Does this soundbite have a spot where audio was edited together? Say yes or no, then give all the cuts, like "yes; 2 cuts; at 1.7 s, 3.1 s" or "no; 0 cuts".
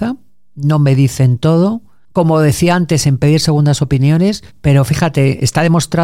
yes; 1 cut; at 4.5 s